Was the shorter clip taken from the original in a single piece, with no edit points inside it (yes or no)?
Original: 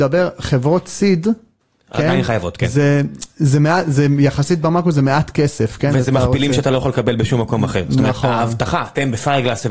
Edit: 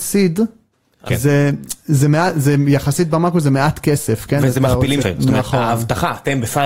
no